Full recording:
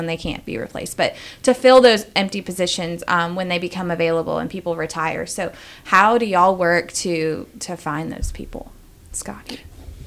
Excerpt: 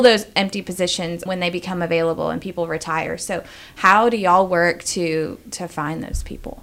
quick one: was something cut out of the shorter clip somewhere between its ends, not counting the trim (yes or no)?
yes